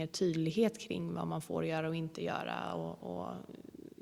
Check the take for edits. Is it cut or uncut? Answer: uncut